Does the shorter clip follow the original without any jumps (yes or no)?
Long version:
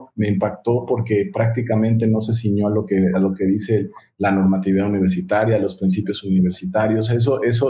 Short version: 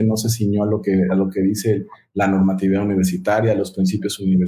yes